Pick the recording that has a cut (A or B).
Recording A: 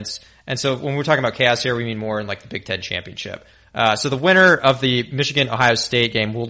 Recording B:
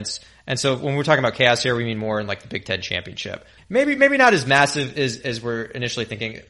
B